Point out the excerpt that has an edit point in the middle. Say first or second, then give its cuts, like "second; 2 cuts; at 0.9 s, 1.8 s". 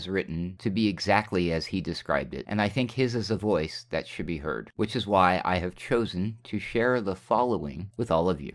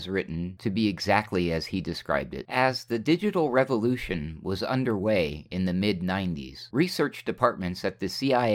second; 1 cut; at 2.5 s